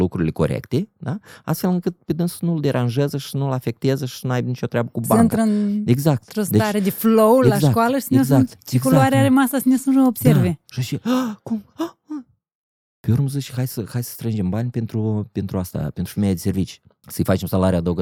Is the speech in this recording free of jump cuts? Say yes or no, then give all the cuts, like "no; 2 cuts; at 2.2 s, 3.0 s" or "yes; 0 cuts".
yes; 0 cuts